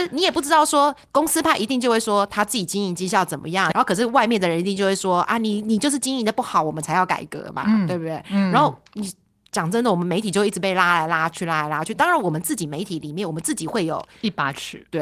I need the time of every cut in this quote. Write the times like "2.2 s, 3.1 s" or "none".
3.7 s